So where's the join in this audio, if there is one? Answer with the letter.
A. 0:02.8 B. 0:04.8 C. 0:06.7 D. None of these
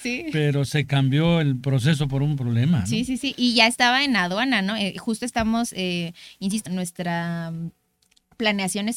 C